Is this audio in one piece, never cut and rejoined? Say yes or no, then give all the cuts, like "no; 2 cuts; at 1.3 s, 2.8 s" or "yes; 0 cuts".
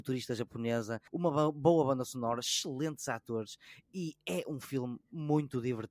no; 1 cut; at 1.1 s